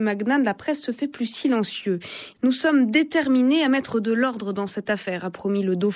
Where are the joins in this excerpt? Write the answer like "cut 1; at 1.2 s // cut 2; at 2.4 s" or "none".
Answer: cut 1; at 2.3 s